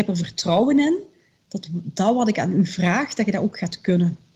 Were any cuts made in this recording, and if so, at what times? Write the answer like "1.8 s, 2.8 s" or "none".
none